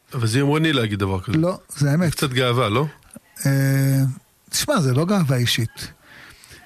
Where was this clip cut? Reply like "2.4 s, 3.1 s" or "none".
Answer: 1.7 s